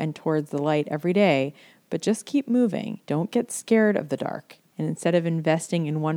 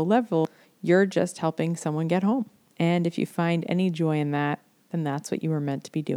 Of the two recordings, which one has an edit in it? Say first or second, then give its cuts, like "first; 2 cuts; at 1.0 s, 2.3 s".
first; 2 cuts; at 3.0 s, 4.7 s